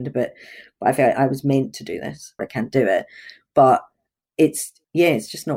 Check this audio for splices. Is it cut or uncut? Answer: cut